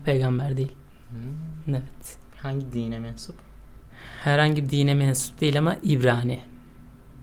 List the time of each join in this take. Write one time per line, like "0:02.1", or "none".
none